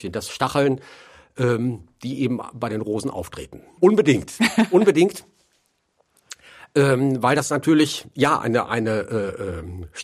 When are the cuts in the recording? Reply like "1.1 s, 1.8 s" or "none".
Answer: 3.8 s